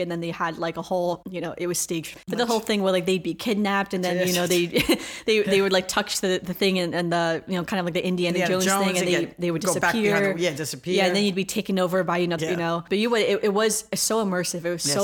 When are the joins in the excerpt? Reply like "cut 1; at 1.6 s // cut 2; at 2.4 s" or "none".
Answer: cut 1; at 2.1 s // cut 2; at 12.4 s